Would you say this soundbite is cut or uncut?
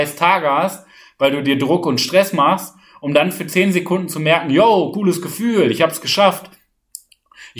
uncut